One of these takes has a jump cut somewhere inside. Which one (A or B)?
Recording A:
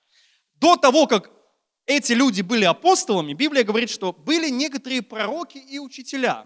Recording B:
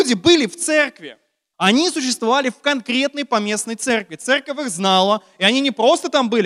B